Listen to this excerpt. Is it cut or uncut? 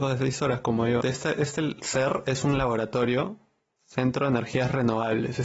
cut